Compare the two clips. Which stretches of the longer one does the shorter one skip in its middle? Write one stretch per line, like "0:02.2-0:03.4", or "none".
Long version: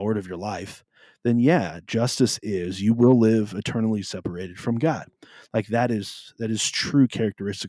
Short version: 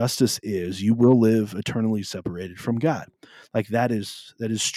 none

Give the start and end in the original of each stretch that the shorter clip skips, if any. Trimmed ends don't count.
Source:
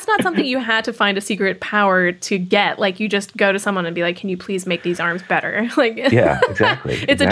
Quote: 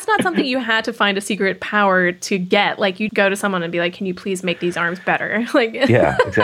0:03.1-0:03.3

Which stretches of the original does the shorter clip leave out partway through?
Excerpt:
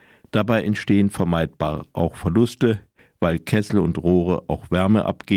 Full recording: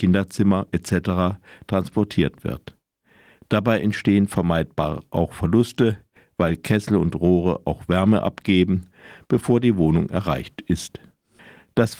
none

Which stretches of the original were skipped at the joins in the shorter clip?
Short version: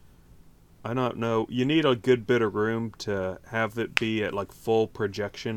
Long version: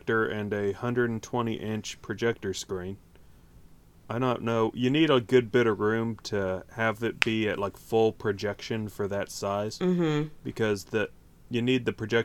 none

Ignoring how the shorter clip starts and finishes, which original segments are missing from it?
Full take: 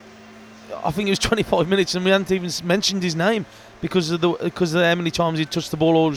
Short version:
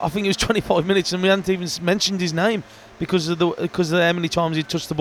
none

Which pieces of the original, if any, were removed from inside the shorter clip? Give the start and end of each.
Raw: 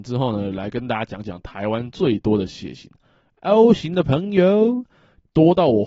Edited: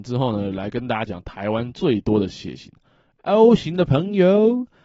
0:01.1-0:01.2

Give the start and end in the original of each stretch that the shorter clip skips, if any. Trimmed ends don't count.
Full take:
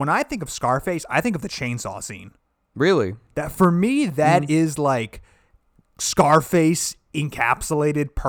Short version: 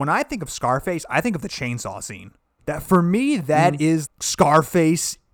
0:02.6-0:03.3
0:04.8-0:05.9

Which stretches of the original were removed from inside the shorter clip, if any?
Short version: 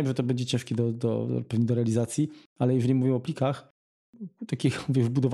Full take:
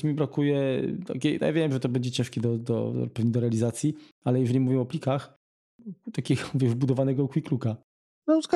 none

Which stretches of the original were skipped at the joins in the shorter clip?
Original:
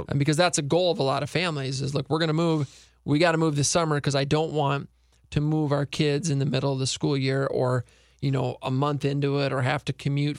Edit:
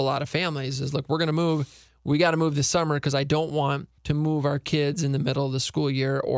0:05.0-0:05.2

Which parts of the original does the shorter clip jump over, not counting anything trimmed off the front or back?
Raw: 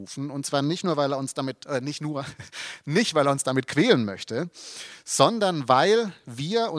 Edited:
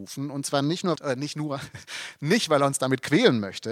0:01.0-0:01.6

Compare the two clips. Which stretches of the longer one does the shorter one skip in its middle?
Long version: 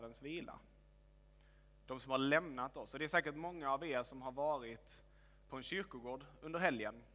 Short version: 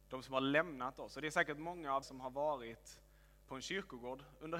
0:03.8-0:04.0

